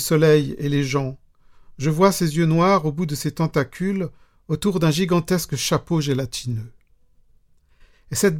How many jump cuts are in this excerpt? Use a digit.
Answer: 0